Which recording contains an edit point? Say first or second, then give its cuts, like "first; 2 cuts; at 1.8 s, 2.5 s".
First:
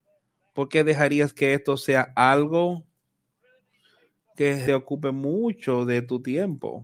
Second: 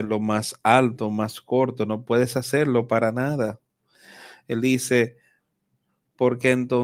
first; 1 cut; at 4.7 s